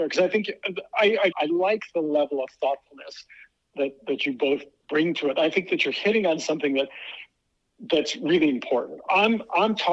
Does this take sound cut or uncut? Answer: cut